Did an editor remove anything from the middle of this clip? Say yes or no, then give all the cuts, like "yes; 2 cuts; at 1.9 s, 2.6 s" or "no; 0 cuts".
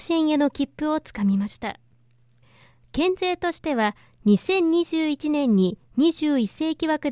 no; 0 cuts